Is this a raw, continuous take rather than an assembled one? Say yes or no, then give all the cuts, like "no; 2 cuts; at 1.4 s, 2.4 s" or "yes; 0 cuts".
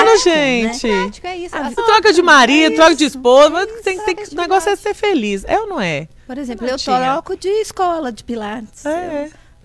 no; 1 cut; at 1.8 s